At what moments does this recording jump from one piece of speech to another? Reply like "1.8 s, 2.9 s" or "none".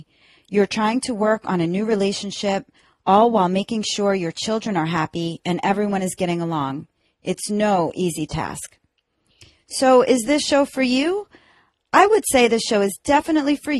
none